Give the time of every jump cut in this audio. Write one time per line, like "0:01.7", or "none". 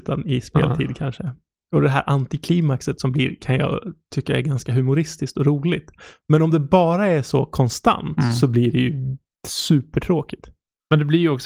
none

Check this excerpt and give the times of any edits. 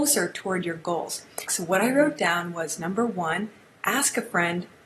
0:01.5

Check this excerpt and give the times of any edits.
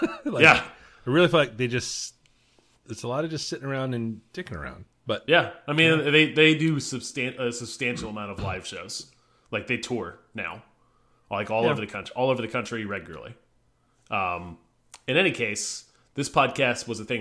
none

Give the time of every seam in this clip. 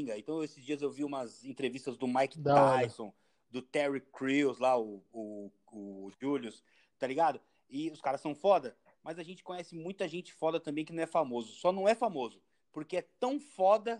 none

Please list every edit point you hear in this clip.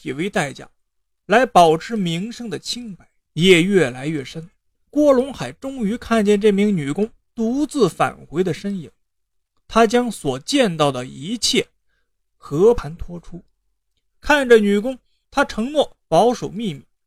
0:03.3
0:15.2

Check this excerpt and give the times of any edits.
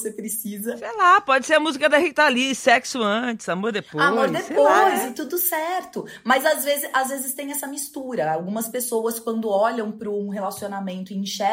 none

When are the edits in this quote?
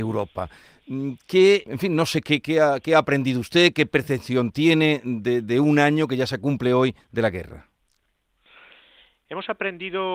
0:01.7

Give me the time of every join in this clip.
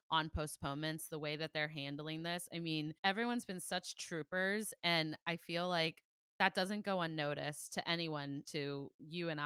0:03.0
0:08.5

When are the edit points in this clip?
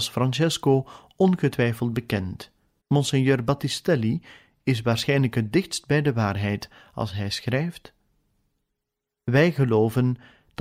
0:02.8

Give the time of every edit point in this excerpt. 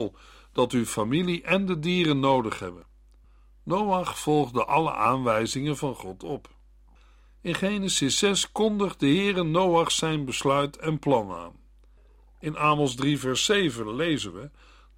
none

